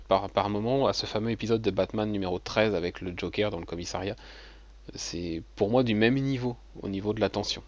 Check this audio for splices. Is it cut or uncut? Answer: uncut